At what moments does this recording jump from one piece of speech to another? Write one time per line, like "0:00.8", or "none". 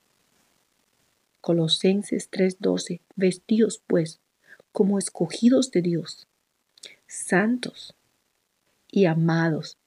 none